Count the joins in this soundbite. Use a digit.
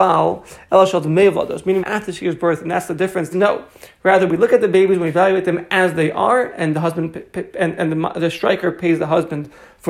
2